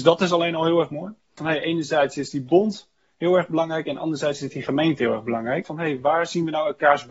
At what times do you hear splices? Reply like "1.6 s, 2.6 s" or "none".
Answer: 1.4 s, 5.6 s